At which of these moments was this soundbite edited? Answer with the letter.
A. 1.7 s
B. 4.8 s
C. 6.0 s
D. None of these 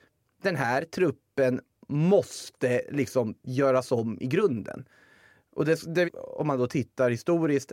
C